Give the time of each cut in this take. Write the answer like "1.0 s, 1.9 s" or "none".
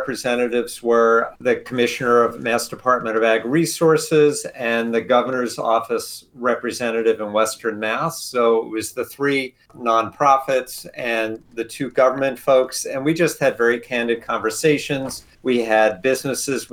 none

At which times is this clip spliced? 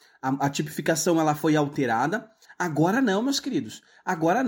2.5 s

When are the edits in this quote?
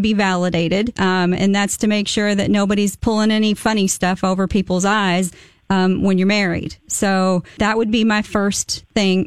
1.0 s, 7.6 s

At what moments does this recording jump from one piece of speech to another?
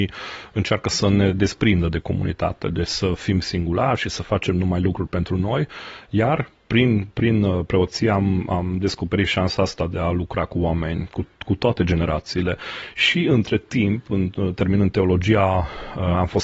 none

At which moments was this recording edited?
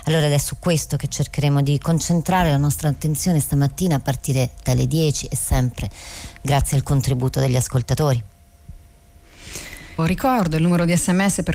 10.0 s

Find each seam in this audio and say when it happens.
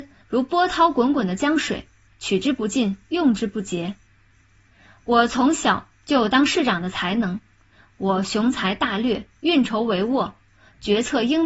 none

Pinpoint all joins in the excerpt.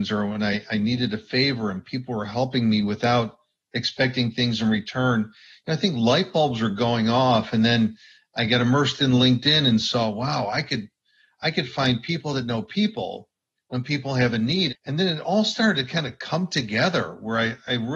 14.7 s

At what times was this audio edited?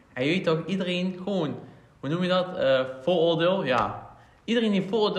none

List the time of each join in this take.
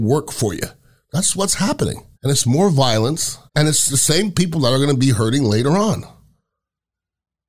2.1 s, 3.5 s

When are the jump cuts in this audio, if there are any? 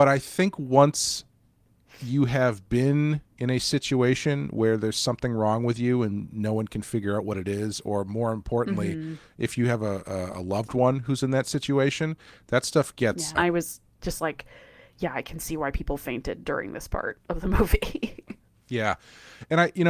13.3 s

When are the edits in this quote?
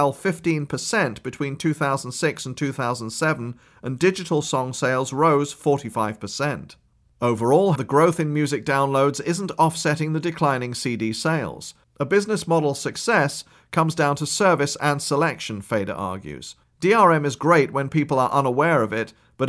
7.8 s, 11.8 s, 16.6 s

